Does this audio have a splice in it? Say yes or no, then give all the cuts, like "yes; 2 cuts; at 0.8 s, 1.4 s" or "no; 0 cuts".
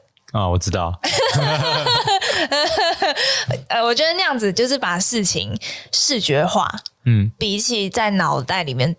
no; 0 cuts